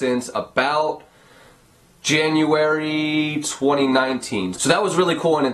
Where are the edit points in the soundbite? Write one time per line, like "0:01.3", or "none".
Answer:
0:04.5